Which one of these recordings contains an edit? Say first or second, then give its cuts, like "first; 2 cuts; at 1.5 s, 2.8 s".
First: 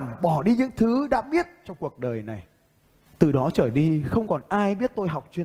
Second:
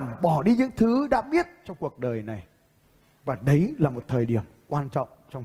first; 1 cut; at 3.1 s